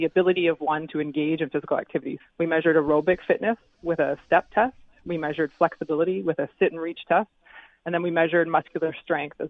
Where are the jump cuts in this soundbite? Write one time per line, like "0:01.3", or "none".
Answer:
0:02.2